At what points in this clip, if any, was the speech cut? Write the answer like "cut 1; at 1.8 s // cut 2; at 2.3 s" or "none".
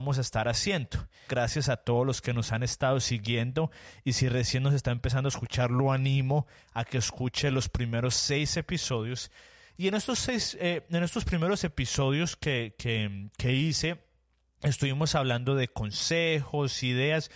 cut 1; at 1.3 s